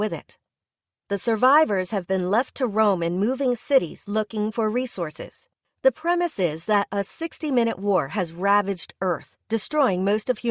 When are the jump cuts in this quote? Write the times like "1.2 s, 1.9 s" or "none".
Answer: 5.6 s